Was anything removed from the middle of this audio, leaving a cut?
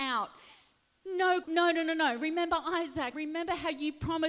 yes; 2 cuts; at 1.4 s, 3.1 s

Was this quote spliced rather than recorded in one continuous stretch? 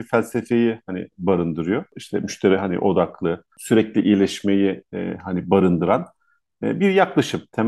yes; 1 cut; at 3.5 s

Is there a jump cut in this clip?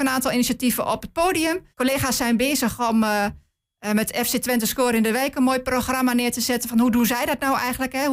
yes; 1 cut; at 1.7 s

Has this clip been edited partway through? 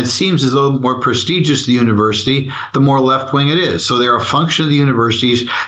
no; 0 cuts

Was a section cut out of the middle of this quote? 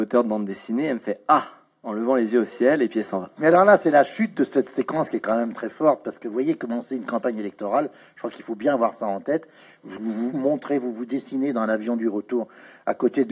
yes; 2 cuts; at 3.4 s, 10.3 s

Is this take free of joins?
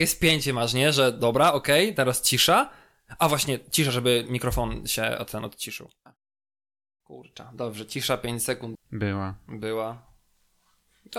no; 1 cut; at 8.8 s

